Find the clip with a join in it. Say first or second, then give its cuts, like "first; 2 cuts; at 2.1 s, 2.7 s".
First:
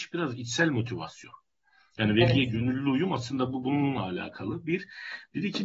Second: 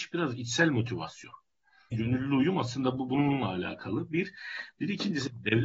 second; 1 cut; at 1.9 s